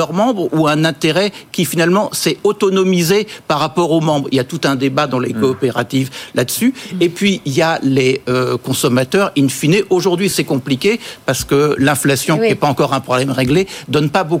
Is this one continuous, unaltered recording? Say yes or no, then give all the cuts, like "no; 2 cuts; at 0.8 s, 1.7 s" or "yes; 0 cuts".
yes; 0 cuts